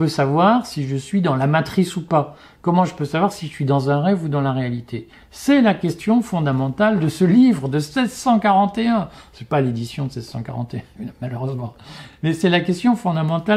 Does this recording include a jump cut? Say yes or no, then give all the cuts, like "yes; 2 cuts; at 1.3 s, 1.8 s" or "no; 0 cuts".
no; 0 cuts